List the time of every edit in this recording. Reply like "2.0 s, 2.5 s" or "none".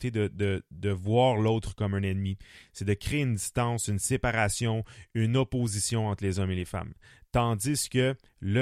none

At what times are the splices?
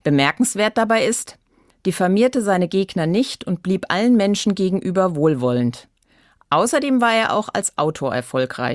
1.7 s

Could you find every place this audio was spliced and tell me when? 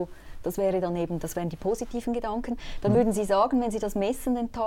none

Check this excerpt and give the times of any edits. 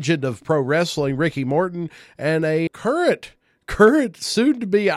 2.7 s

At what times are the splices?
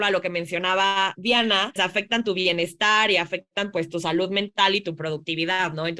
1.8 s

